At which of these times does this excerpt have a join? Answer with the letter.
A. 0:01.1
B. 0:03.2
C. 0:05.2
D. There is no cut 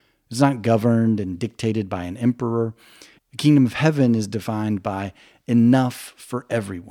B